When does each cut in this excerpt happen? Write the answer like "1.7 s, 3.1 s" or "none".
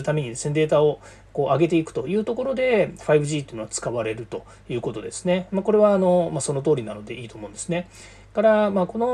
none